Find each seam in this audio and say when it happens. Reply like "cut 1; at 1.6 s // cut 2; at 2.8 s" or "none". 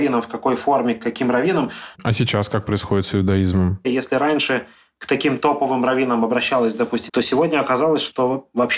cut 1; at 1.9 s // cut 2; at 3.8 s // cut 3; at 7.1 s